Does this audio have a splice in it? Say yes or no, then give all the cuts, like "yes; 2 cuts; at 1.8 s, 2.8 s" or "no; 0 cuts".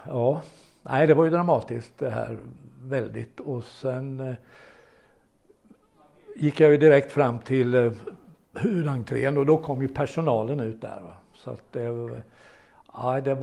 no; 0 cuts